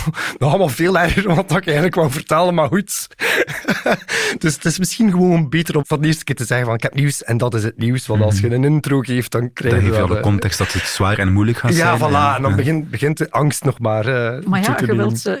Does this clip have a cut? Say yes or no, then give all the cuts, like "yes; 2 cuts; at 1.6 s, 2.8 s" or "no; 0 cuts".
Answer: yes; 1 cut; at 5.8 s